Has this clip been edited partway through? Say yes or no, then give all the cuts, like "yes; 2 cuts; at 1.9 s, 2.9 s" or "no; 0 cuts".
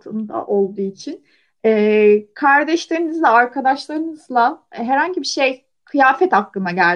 no; 0 cuts